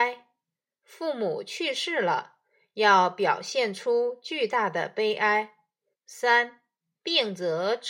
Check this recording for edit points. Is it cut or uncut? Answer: cut